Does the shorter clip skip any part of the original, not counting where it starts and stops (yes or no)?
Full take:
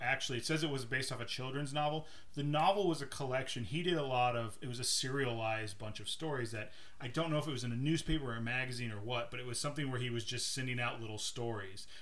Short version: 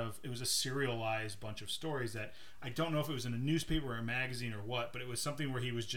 no